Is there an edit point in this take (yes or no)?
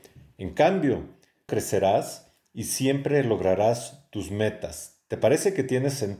yes